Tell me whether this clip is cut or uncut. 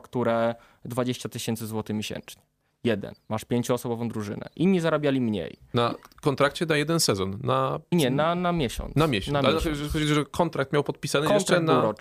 cut